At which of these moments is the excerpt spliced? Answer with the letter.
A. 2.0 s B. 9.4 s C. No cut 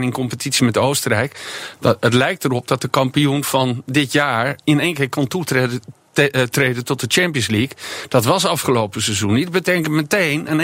C